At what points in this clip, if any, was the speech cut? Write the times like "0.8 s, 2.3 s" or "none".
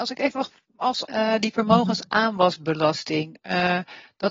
1.0 s